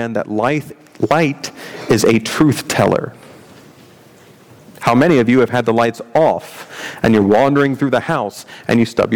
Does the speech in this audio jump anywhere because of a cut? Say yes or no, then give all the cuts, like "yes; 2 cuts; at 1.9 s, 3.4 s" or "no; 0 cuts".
no; 0 cuts